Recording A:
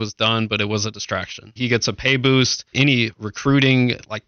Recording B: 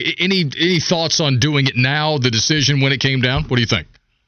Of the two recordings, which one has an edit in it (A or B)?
A